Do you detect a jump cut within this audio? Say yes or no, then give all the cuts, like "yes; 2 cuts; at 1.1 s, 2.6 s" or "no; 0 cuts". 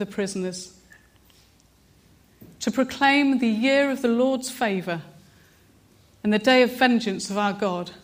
no; 0 cuts